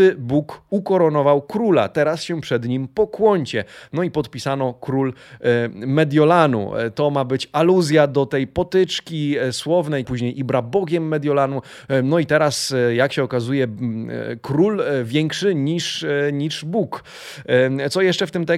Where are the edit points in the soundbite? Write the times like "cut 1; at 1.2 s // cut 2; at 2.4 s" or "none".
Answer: cut 1; at 10.0 s